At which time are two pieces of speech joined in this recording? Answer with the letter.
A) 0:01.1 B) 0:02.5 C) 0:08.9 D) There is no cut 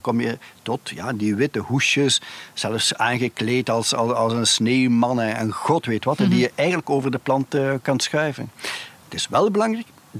D